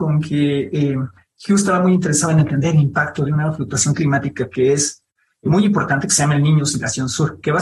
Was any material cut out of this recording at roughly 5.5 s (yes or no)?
yes